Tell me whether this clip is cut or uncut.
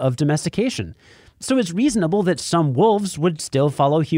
uncut